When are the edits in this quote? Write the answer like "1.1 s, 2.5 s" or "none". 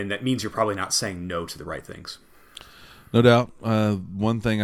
none